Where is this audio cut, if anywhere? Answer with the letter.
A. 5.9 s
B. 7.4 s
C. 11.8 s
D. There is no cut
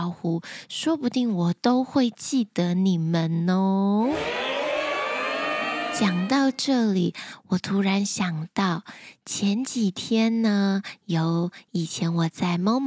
D